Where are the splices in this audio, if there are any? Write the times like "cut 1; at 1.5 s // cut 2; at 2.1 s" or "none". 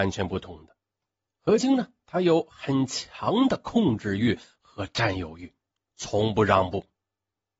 cut 1; at 1.6 s